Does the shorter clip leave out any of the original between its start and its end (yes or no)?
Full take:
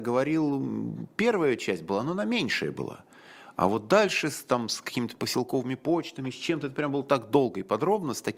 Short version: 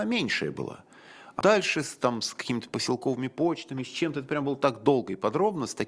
yes